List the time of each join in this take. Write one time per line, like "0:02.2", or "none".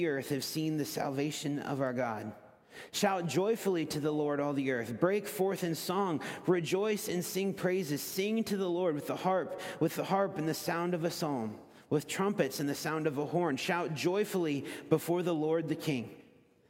none

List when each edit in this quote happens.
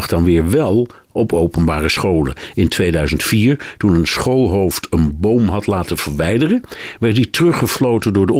none

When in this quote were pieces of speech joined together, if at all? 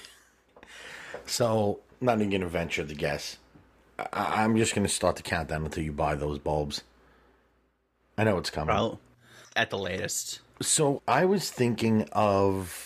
0:09.4

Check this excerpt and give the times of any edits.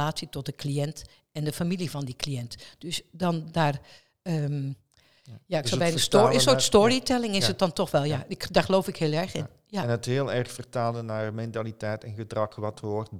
none

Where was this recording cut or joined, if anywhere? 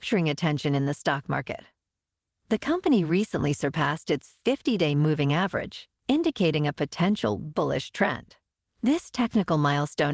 none

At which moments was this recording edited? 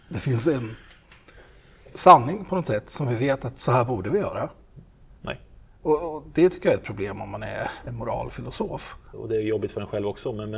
0:05.2
0:09.1

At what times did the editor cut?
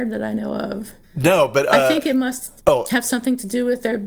0:01.0
0:02.6

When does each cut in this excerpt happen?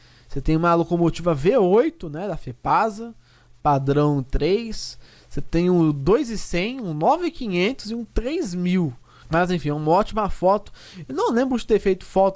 0:09.2

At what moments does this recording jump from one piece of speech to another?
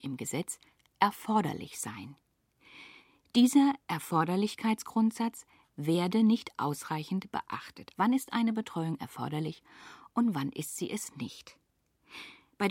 0:07.9

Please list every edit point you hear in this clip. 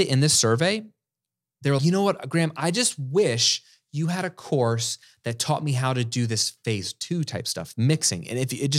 0:01.8

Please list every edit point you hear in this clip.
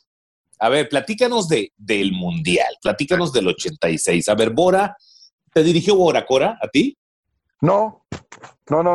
none

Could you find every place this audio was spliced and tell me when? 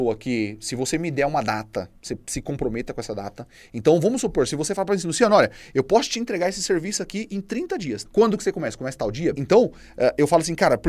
0:08.0
0:09.3

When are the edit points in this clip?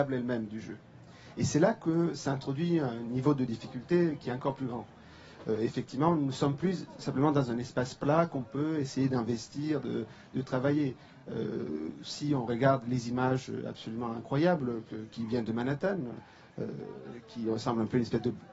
none

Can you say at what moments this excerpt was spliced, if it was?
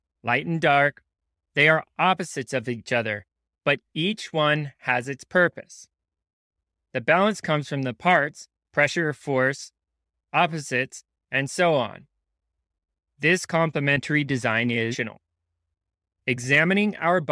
none

